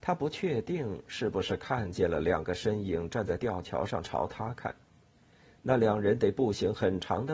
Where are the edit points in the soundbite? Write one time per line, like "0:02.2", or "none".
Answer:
none

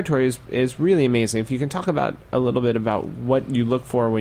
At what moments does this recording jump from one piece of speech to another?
none

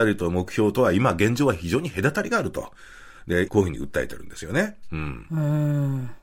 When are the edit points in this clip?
0:03.5

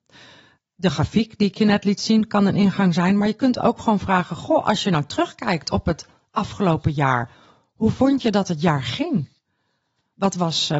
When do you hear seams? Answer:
none

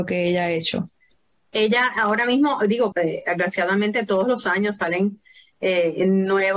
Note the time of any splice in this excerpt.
0:02.9

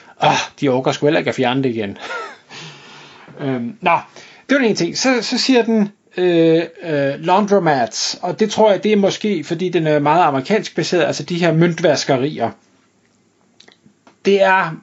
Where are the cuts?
0:02.4

